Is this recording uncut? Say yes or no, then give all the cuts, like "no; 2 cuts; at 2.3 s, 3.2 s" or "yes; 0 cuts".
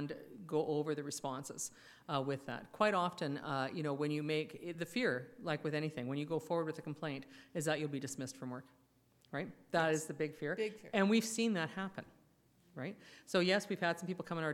yes; 0 cuts